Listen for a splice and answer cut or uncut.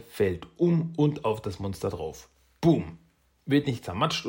uncut